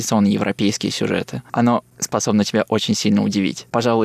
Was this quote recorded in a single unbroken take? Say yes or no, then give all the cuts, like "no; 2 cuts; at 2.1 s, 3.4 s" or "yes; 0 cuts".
no; 1 cut; at 1.5 s